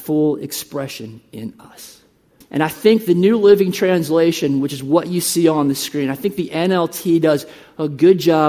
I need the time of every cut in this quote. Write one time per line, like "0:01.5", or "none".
0:02.4